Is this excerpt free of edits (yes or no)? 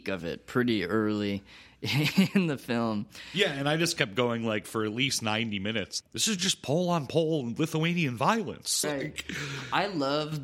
no